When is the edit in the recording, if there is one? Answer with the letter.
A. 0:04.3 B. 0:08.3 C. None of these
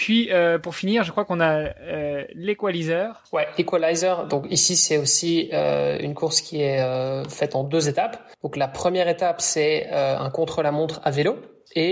B